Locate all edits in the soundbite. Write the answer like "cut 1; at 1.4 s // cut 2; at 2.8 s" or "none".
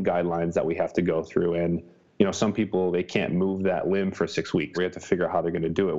cut 1; at 4.7 s